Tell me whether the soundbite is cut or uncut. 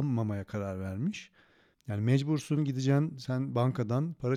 cut